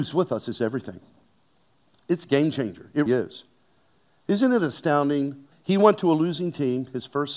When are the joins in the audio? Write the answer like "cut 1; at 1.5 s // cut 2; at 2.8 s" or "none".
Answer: cut 1; at 3.1 s // cut 2; at 5.5 s